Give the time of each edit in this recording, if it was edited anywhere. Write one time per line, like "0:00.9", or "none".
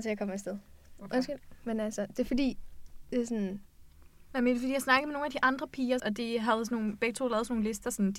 0:04.3
0:06.0